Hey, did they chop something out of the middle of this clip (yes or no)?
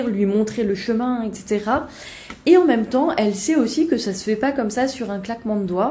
no